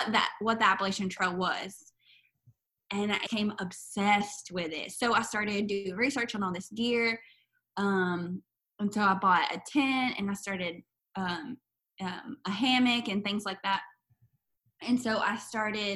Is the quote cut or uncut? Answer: cut